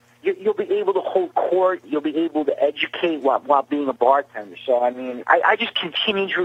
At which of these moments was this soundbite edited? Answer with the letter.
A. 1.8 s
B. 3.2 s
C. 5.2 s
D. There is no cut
C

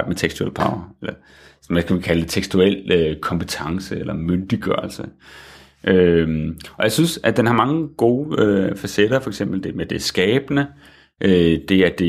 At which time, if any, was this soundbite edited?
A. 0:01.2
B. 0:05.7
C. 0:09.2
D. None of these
D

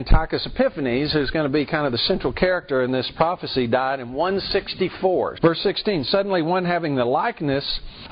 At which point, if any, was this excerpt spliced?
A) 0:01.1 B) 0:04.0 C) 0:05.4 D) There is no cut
C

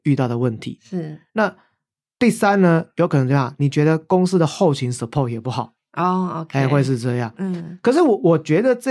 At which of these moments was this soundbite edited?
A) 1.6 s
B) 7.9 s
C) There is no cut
C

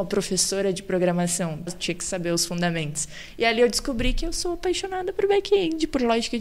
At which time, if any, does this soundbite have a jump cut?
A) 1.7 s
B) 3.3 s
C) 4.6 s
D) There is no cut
A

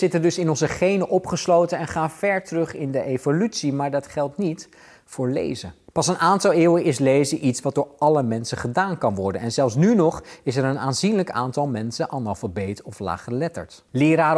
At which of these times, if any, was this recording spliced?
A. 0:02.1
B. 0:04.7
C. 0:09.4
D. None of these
D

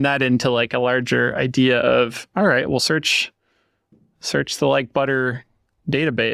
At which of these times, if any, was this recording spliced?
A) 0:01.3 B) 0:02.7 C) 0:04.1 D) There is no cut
D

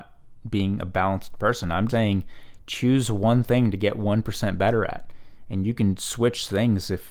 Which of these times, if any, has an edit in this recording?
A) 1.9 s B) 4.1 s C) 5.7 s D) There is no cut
A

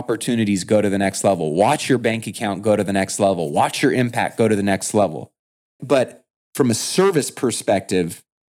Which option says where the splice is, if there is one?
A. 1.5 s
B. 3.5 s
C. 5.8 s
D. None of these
C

